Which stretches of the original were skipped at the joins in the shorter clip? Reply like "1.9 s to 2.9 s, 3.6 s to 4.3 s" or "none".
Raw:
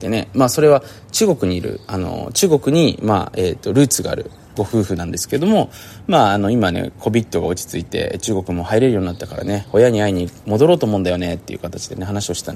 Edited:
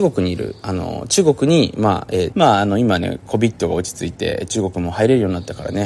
3.6 s to 6.0 s